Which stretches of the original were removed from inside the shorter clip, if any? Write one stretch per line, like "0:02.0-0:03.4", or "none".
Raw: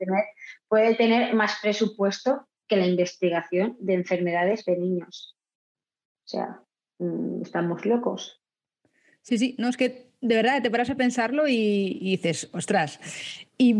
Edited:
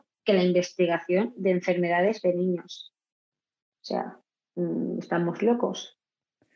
none